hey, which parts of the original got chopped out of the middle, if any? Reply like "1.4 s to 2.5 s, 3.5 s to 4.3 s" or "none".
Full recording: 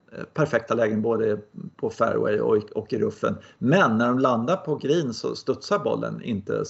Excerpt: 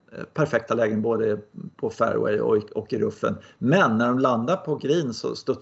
none